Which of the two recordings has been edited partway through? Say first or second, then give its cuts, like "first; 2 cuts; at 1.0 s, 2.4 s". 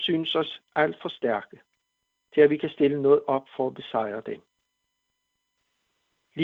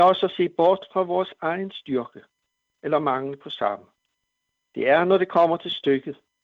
second; 1 cut; at 4.7 s